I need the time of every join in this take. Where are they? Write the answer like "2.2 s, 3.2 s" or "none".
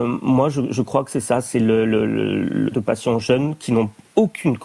2.7 s